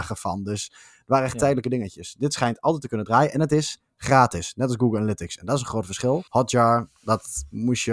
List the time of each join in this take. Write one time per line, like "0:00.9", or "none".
0:06.3